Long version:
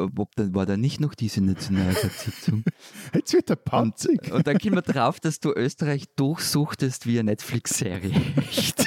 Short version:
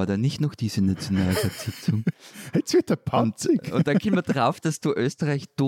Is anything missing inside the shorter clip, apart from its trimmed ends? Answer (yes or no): no